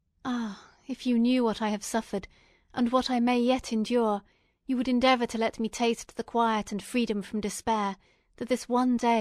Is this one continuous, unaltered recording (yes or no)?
yes